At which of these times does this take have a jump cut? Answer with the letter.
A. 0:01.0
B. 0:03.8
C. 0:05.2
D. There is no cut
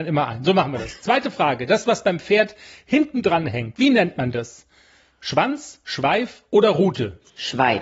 D